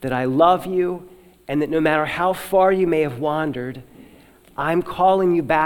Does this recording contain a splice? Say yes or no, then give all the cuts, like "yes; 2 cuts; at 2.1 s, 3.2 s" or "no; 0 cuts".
no; 0 cuts